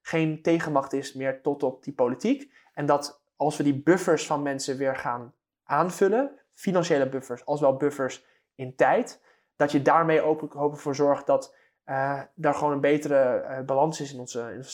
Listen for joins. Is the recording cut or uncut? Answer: uncut